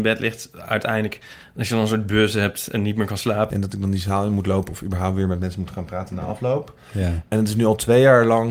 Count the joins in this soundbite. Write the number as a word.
one